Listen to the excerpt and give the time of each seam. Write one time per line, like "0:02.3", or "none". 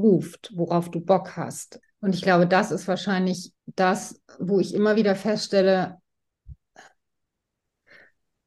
0:01.8
0:03.6